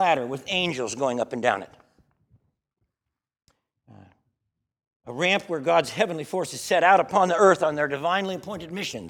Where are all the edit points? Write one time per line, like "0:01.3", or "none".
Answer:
0:05.0